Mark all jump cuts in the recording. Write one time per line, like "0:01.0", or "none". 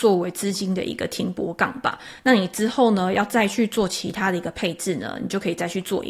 none

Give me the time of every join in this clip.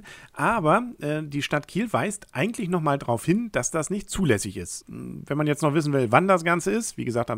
0:04.8

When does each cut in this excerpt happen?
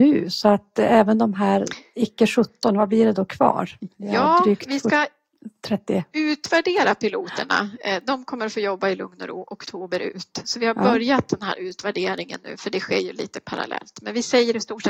none

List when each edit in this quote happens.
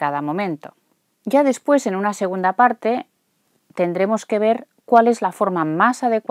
none

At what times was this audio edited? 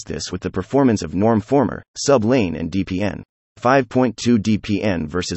0:03.5

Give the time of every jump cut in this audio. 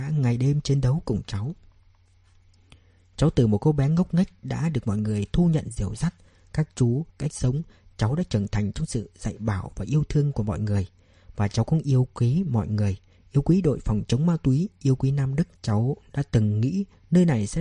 0:07.1
0:15.5

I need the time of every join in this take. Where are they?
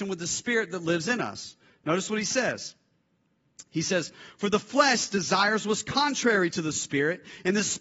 none

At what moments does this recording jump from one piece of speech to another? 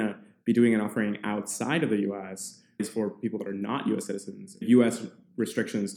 none

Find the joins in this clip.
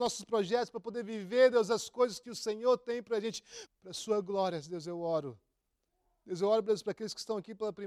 0:03.7

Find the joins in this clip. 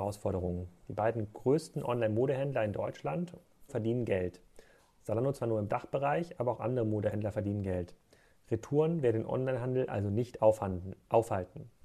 0:03.7

